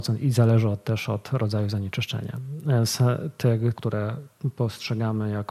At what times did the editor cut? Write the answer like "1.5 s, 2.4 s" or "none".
3.8 s